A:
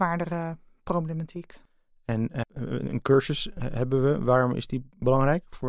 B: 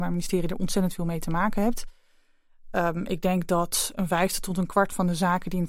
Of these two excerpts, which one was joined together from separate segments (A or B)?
A